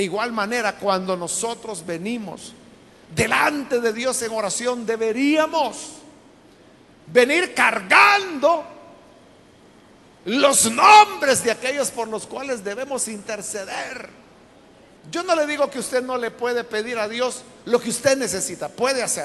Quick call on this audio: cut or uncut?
cut